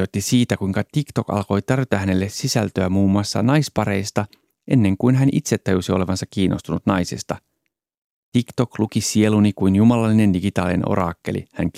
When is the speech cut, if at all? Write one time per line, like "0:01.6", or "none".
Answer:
none